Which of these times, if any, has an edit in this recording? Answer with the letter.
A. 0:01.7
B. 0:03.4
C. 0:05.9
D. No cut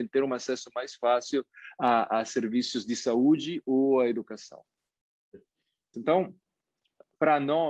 C